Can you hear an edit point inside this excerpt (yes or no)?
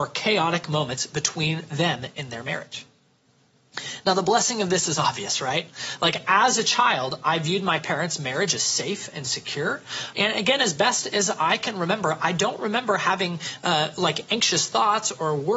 yes